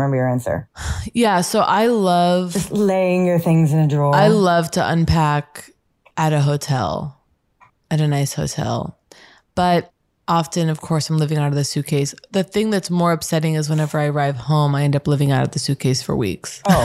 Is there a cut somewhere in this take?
no; 0 cuts

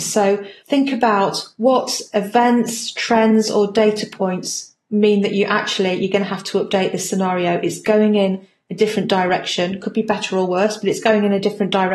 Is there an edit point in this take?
no; 0 cuts

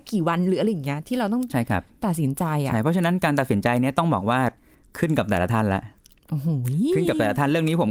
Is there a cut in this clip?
no; 0 cuts

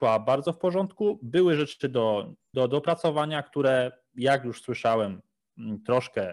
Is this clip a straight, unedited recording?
no; 1 cut; at 2.5 s

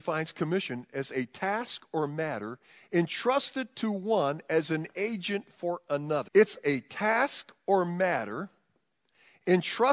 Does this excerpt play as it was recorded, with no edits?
no; 1 cut; at 6.3 s

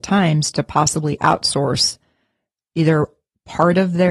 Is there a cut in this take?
no; 0 cuts

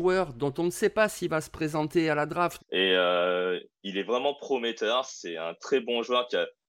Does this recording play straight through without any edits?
no; 1 cut; at 2.6 s

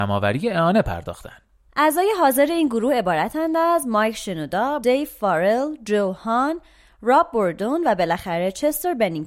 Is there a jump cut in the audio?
yes; 1 cut; at 4.8 s

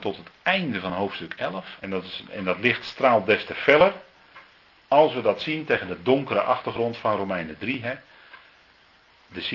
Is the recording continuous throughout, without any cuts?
no; 1 cut; at 1.8 s

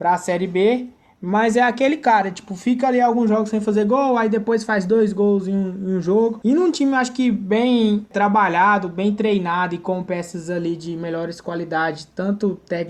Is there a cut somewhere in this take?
no; 0 cuts

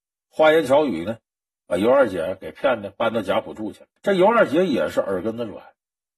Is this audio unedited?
no; 1 cut; at 4.0 s

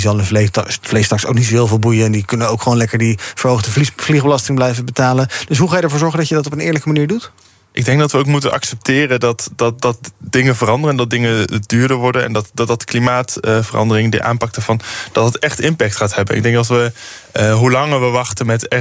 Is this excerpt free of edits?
yes; 0 cuts

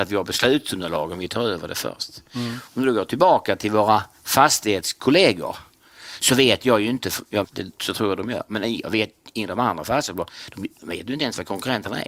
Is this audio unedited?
no; 2 cuts; at 7.4 s, 10.8 s

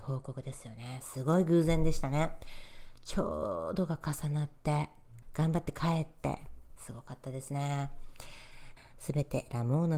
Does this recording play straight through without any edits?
no; 3 cuts; at 5.2 s, 6.8 s, 8.8 s

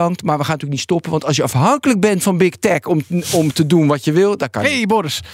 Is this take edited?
no; 0 cuts

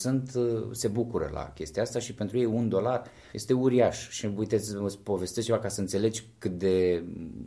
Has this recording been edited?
yes; 1 cut; at 3.3 s

